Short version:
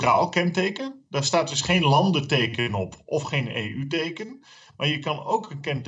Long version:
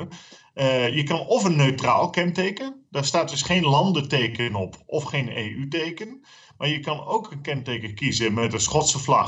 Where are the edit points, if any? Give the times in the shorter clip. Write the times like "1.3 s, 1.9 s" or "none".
none